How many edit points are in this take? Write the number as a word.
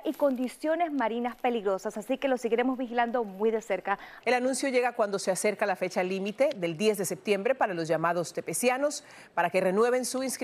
one